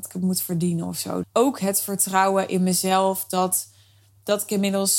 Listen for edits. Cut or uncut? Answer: cut